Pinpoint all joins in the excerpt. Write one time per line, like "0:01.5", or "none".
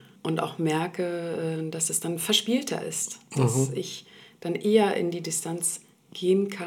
0:03.3